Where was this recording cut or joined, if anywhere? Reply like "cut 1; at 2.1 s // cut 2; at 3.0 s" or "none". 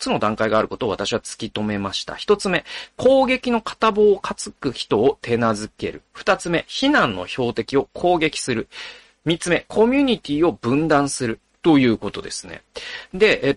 cut 1; at 11.6 s